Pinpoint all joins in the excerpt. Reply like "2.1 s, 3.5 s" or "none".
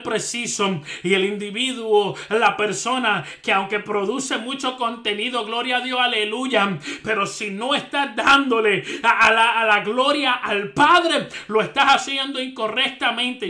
none